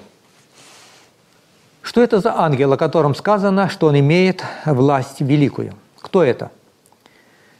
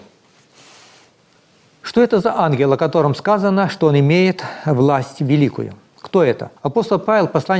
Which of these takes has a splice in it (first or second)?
second